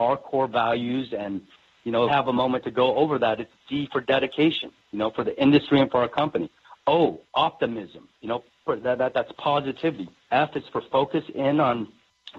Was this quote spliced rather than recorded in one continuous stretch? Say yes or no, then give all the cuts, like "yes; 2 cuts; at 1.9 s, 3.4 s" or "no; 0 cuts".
yes; 3 cuts; at 2.1 s, 8.2 s, 10.2 s